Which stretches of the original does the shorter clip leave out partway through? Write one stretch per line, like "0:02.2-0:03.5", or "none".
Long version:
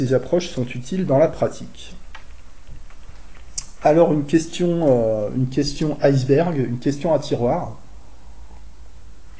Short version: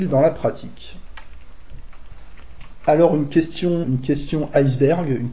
0:04.8-0:05.3